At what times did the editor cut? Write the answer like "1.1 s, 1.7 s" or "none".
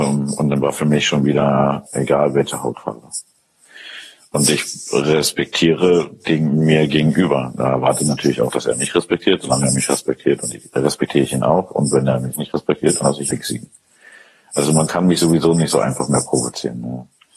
1.9 s, 13.3 s